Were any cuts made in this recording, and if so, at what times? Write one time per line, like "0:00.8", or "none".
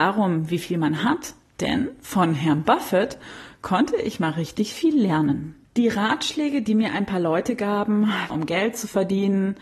0:01.5
0:05.7
0:08.3

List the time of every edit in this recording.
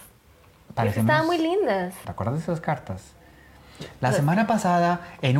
0:02.0

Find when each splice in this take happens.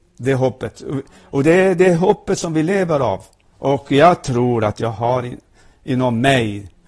0:03.5

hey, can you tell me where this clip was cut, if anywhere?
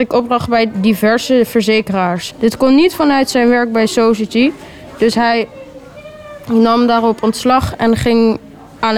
0:02.3

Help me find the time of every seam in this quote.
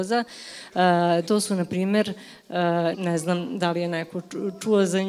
0:01.3
0:02.9

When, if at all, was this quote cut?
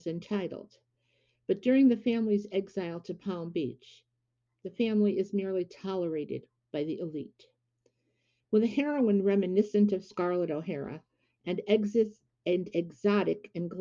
0:08.4

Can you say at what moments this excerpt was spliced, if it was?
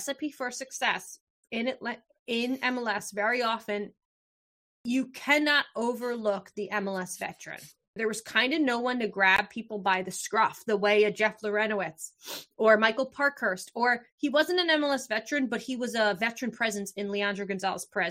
0:08.0

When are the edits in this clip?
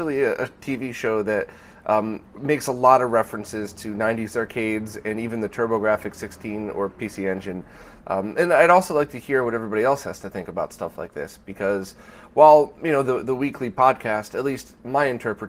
0:08.0

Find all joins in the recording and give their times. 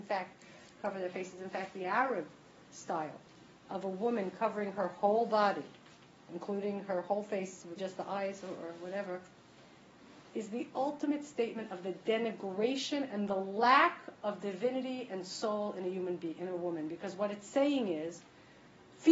0:07.8

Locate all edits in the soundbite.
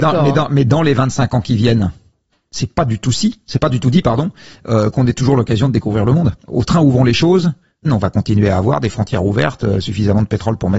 0:06.4
0:07.8

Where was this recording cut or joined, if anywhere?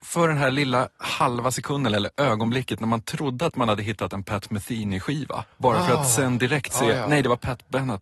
0:05.5

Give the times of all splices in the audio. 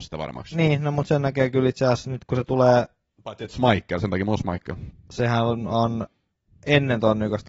0:04.9

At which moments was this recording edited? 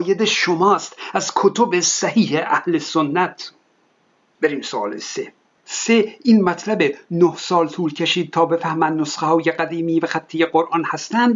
none

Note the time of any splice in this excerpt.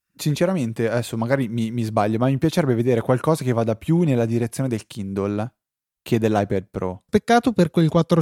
0:07.1

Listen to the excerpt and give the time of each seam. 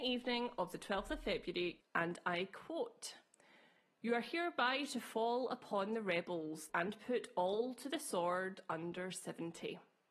0:01.8
0:06.7

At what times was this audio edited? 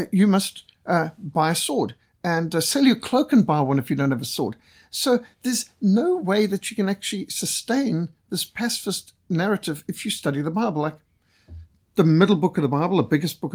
none

